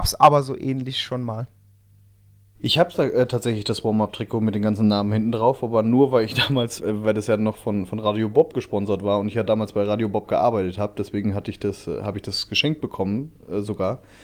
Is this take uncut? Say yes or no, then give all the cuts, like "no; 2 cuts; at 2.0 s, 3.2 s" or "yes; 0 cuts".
no; 1 cut; at 6.8 s